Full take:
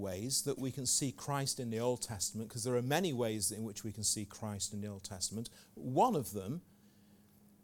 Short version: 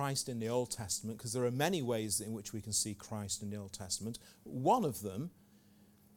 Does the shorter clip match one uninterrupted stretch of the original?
yes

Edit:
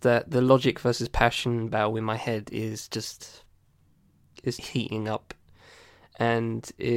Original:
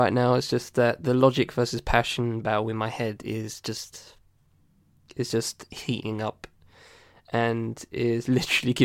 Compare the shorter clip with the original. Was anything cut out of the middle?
yes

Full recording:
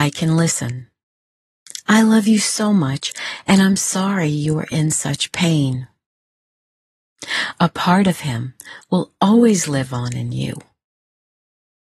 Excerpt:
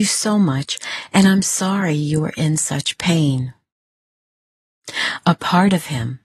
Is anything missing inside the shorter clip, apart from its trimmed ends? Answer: no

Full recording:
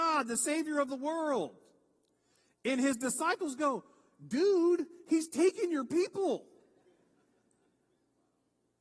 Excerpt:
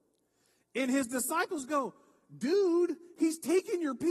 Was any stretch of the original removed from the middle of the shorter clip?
no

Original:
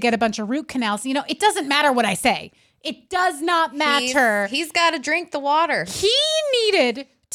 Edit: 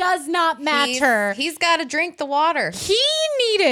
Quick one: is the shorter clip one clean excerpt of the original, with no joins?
yes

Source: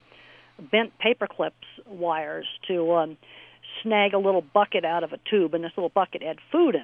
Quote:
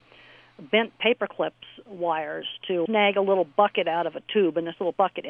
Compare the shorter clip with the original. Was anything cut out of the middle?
yes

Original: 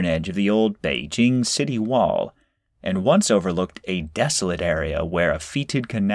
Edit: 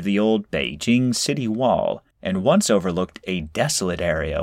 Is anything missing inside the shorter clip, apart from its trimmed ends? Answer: yes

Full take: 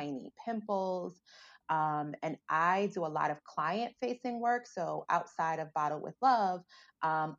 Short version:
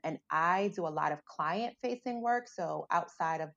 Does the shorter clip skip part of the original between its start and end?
no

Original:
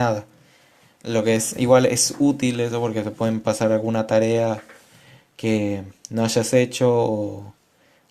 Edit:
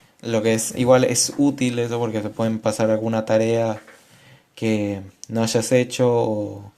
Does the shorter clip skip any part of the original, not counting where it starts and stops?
no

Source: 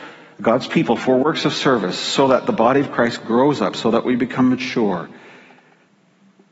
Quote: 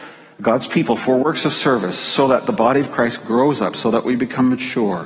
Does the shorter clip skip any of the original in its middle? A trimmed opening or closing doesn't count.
no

